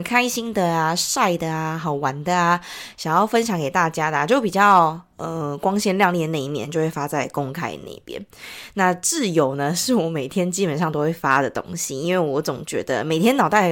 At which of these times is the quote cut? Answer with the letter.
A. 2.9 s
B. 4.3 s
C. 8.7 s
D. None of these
D